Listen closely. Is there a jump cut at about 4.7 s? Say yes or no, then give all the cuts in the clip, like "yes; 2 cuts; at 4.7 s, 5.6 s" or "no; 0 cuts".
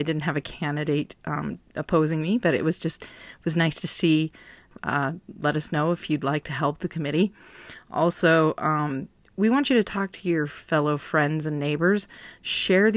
yes; 1 cut; at 4.7 s